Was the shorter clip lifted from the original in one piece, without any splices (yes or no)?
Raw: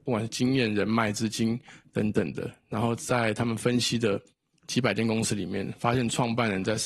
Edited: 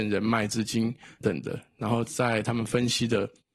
no